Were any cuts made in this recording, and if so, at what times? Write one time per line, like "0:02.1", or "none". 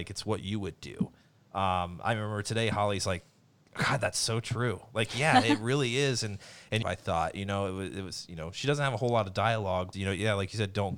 0:06.8
0:09.9